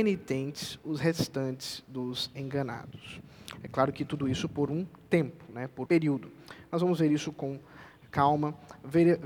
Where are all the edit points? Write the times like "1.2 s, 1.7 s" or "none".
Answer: 5.9 s